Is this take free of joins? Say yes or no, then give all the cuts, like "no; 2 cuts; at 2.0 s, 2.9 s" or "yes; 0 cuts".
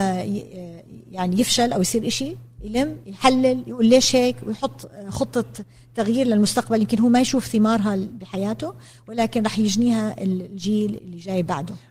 no; 1 cut; at 11.0 s